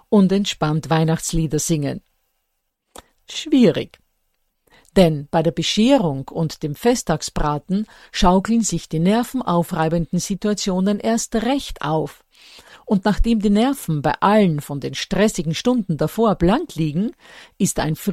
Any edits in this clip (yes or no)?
no